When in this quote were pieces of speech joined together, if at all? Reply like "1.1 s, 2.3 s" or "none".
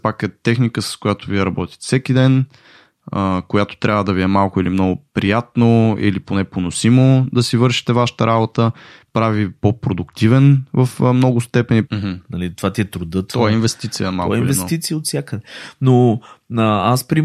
11.8 s